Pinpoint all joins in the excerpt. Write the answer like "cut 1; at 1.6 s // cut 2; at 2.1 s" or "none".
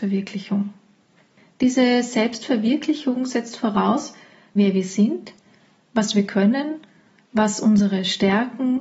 cut 1; at 4.6 s